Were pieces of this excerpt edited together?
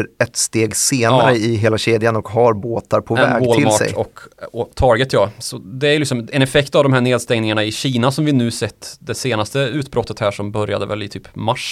no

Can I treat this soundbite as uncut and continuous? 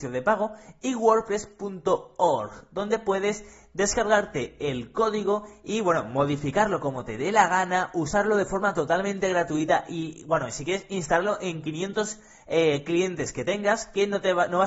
yes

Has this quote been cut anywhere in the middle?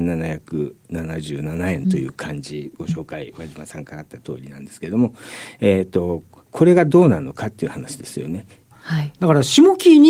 yes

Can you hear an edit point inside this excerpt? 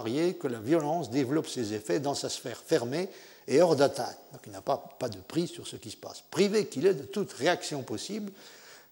no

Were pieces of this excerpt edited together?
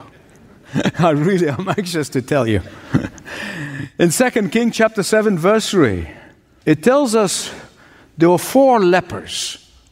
no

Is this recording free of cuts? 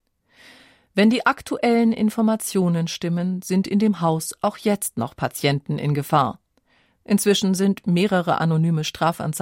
yes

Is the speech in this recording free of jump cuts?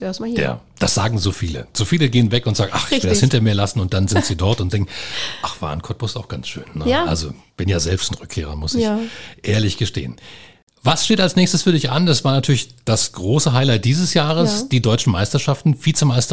yes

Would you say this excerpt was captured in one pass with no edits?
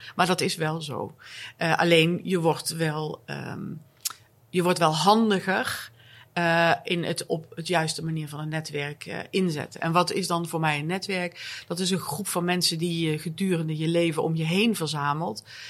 yes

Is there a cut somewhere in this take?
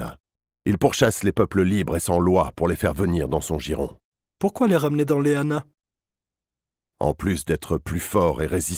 yes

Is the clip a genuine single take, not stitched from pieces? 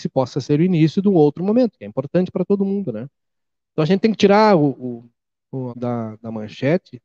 no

